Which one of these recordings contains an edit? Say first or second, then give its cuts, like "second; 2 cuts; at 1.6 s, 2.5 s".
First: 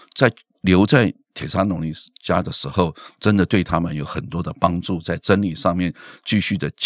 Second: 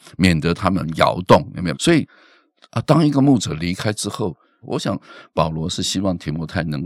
second; 2 cuts; at 1.7 s, 4.6 s